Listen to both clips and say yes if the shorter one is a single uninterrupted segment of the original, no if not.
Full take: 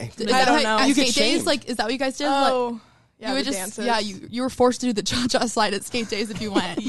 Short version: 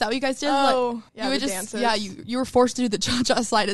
no